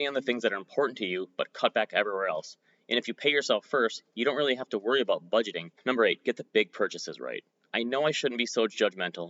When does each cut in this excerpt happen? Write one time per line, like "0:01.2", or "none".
0:05.8